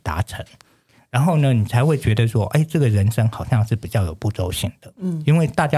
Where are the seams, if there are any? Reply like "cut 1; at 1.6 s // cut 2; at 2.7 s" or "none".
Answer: none